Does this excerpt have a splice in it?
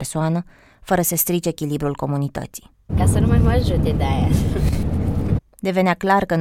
yes; 2 cuts; at 2.9 s, 5.4 s

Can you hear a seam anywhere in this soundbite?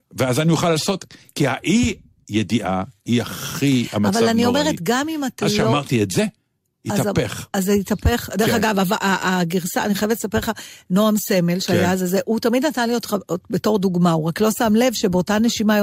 no; 0 cuts

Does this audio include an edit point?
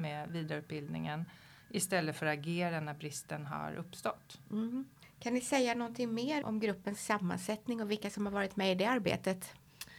yes; 2 cuts; at 5.0 s, 6.4 s

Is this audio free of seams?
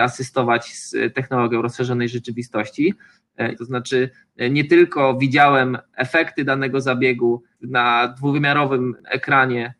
no; 1 cut; at 3.5 s

